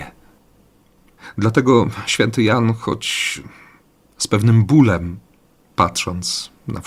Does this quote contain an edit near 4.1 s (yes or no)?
no